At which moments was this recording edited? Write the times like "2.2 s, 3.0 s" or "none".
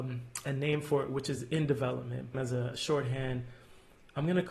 2.3 s